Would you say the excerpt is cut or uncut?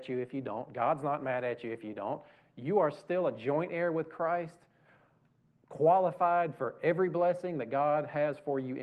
uncut